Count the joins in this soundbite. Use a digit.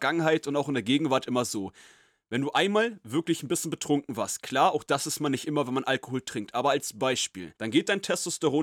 1